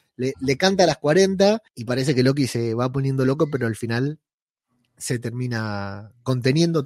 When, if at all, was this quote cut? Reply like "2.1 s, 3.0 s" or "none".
1.7 s

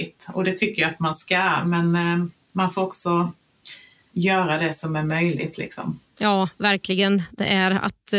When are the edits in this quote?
none

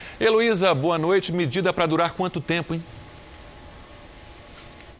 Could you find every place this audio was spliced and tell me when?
none

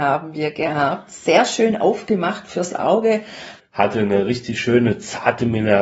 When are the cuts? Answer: 3.6 s

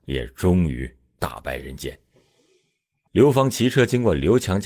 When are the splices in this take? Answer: 3.1 s

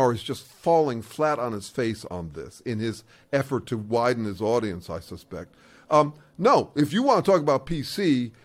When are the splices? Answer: none

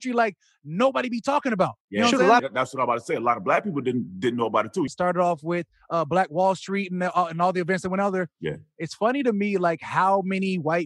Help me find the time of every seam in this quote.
2.4 s, 4.9 s

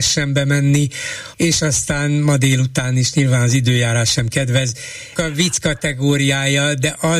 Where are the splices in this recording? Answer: 1.3 s, 5.2 s

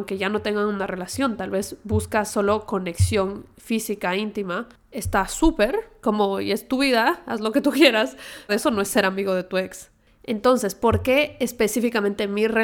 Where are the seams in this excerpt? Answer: 8.5 s

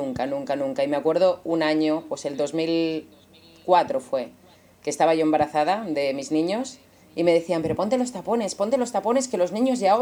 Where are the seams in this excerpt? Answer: none

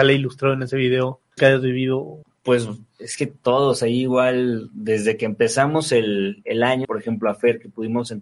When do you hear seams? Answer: 1.4 s, 6.8 s

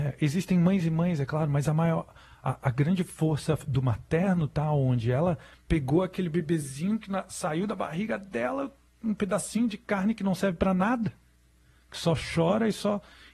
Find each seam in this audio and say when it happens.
none

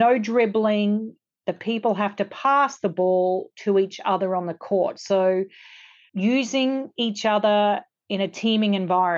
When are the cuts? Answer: none

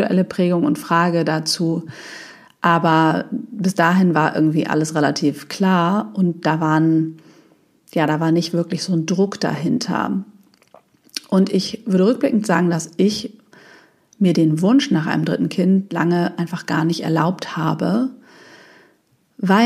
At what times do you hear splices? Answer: none

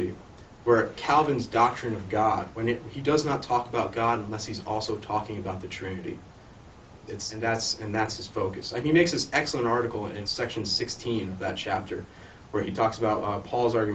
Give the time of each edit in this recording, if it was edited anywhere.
7.1 s, 10.2 s

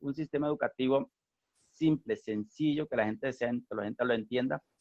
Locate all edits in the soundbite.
3.7 s

